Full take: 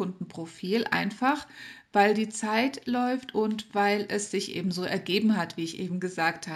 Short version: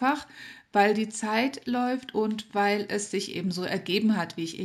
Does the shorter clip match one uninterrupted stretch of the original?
yes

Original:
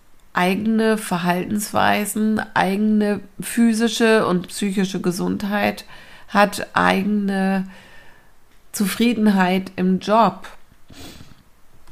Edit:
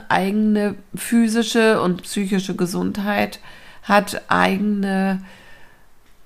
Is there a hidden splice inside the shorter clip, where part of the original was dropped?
no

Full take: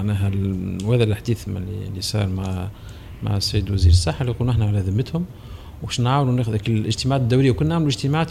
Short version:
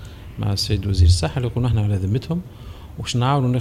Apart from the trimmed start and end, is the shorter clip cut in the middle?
no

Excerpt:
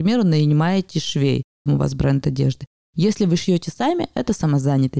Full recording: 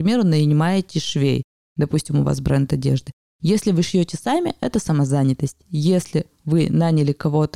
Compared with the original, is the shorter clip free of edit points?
no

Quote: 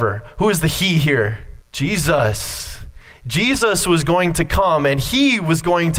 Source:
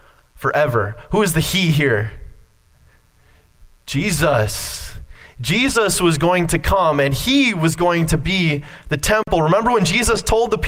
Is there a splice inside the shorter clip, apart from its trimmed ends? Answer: yes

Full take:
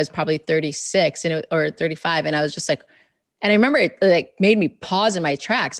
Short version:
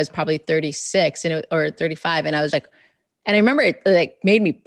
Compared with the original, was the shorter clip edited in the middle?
yes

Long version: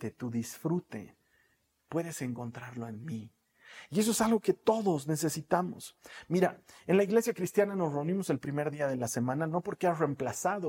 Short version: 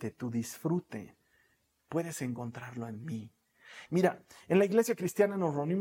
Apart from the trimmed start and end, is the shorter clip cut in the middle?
yes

